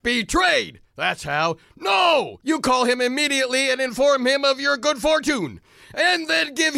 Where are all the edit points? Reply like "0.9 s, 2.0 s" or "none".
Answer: none

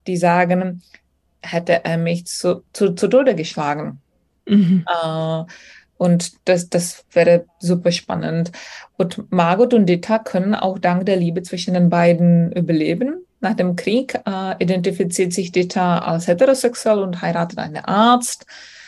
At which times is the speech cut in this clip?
1.4 s

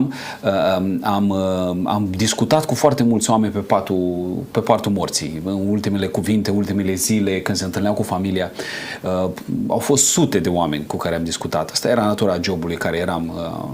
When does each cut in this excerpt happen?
none

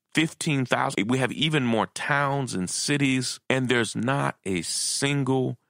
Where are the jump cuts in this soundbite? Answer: 0.9 s, 3.4 s

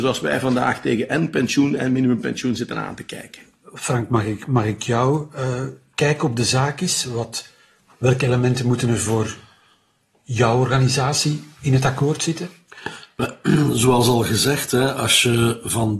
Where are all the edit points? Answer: none

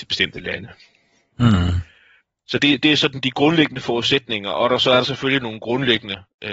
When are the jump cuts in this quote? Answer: none

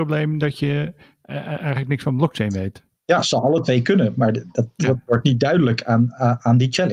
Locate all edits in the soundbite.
none

